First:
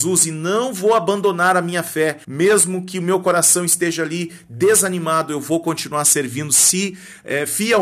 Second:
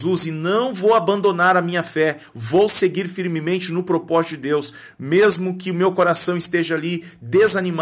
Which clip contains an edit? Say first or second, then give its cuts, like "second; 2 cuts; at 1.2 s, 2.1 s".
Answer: first; 1 cut; at 2.2 s